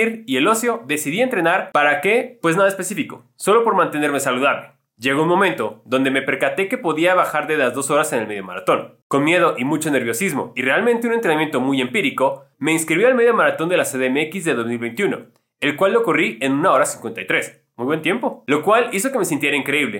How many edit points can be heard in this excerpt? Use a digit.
1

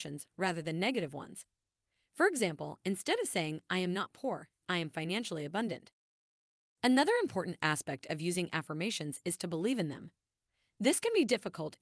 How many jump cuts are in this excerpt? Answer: 1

